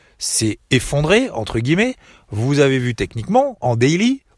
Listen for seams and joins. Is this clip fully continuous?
yes; 0 cuts

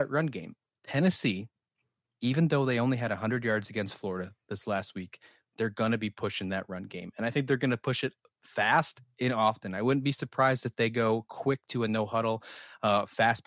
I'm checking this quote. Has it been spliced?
no; 0 cuts

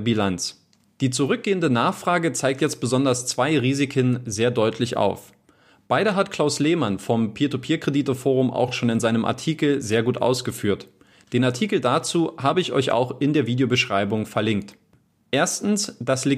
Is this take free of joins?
yes; 0 cuts

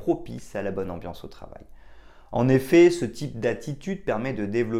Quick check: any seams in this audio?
no; 0 cuts

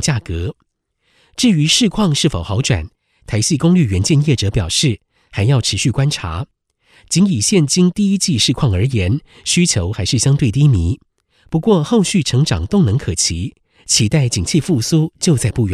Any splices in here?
no; 0 cuts

